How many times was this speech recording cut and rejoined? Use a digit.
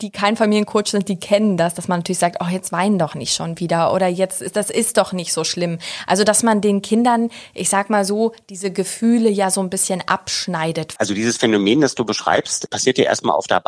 1